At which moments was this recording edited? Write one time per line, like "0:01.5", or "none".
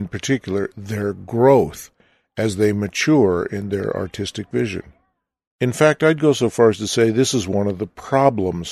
none